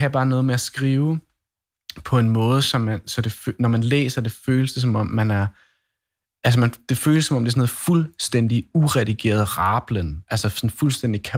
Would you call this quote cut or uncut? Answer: uncut